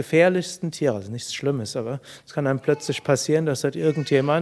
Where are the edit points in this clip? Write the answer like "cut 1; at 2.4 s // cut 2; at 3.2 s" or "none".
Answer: none

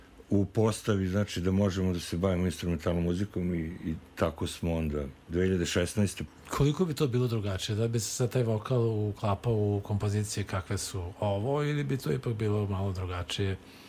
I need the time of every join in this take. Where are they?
cut 1; at 6.3 s

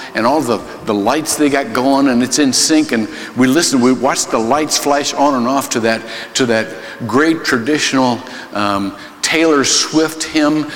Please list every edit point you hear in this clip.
none

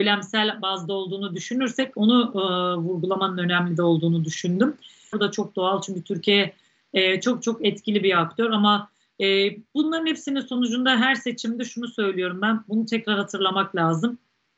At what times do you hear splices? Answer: cut 1; at 5.1 s

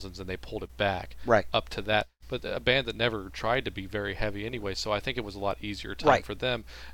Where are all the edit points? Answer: none

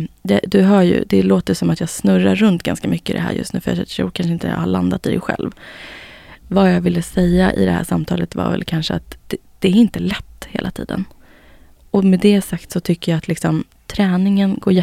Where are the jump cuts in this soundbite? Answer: cut 1; at 9.2 s

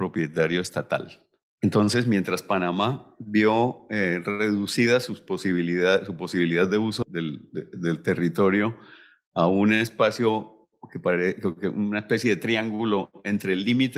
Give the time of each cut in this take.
cut 1; at 1.4 s // cut 2; at 7.0 s

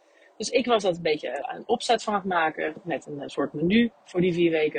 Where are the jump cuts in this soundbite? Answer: cut 1; at 1.4 s

